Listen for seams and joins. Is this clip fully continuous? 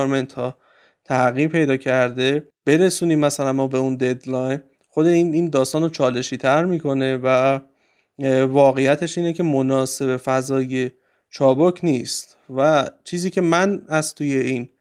yes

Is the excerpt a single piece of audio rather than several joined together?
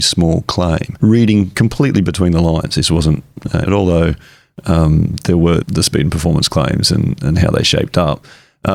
no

